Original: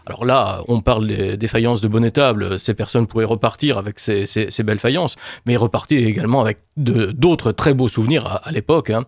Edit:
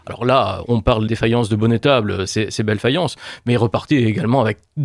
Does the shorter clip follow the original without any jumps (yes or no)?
no